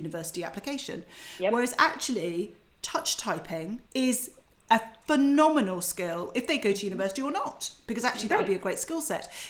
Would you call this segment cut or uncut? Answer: cut